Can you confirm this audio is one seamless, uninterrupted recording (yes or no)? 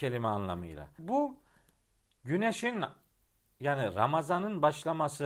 no